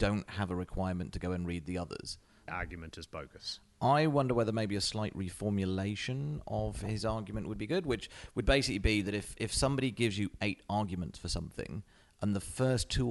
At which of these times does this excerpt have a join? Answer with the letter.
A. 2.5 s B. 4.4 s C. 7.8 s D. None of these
A